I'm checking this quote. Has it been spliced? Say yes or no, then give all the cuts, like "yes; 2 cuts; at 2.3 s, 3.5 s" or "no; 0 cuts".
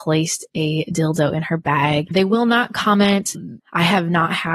yes; 2 cuts; at 2.1 s, 3.6 s